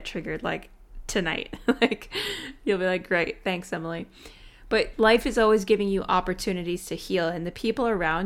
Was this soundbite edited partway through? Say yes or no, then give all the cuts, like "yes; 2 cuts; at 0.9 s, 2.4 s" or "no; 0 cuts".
no; 0 cuts